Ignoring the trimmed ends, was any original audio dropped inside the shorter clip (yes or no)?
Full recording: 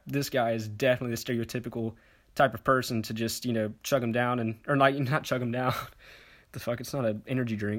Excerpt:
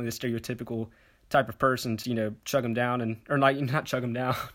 yes